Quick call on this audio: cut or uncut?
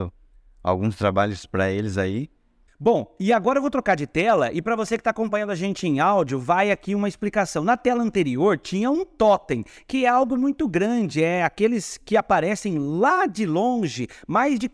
cut